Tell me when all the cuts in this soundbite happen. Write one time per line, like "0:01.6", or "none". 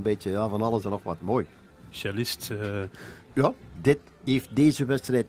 0:01.7
0:03.7